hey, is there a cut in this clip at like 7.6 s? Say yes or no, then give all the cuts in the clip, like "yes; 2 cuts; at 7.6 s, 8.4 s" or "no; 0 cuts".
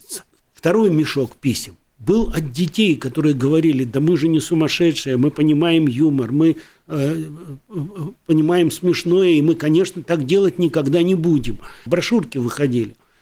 no; 1 cut; at 11.9 s